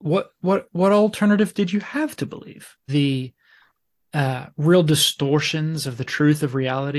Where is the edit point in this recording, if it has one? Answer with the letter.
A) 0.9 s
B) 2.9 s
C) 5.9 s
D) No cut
B